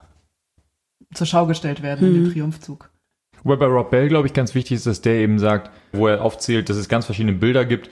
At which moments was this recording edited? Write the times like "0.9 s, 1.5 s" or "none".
5.9 s